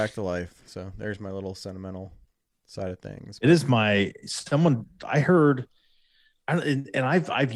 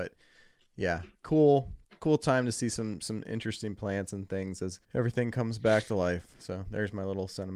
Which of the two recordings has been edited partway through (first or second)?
second